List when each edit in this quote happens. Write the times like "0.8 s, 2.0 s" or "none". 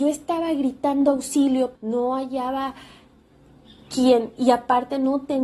1.7 s

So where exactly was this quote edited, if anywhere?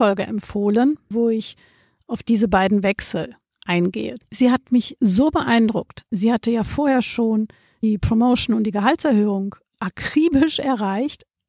1.1 s, 4.2 s

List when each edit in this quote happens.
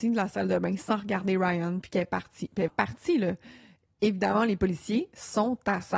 2.7 s

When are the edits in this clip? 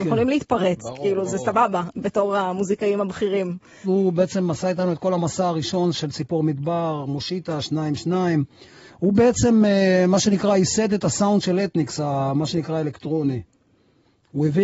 3.8 s

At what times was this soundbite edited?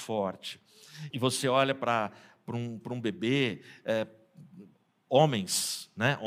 1.1 s

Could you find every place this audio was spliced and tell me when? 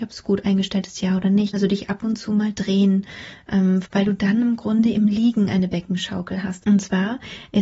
1.5 s, 3.8 s, 6.6 s

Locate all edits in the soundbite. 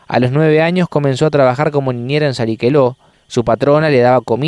3.1 s

